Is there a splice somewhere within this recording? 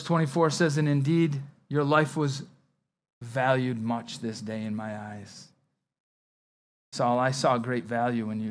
no; 0 cuts

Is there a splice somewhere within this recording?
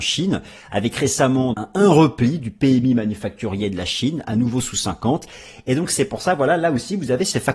yes; 1 cut; at 1.5 s

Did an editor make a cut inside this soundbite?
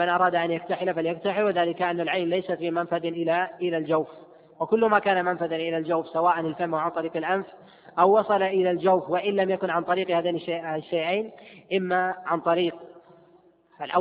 no; 0 cuts

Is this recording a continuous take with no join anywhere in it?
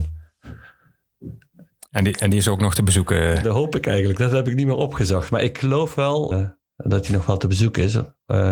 no; 1 cut; at 6.3 s

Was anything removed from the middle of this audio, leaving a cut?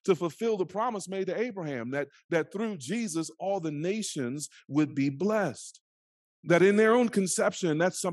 yes; 1 cut; at 6.2 s

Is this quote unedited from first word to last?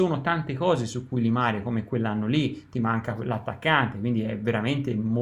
yes; 0 cuts

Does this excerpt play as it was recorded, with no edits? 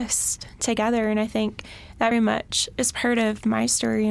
no; 1 cut; at 2.1 s

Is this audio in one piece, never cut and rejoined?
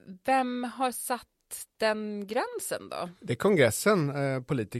yes; 0 cuts

